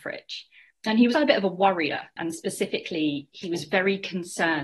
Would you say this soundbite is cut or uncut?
cut